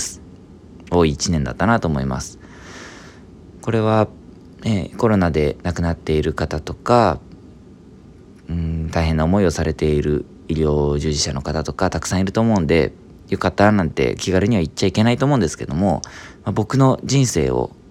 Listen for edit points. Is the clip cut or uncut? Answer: uncut